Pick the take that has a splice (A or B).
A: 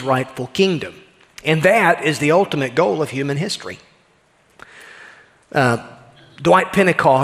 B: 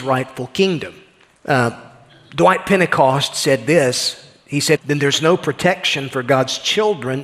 B